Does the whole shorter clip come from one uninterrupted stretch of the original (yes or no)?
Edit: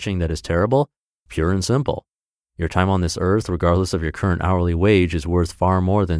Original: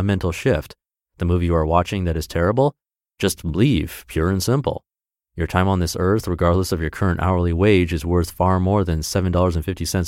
no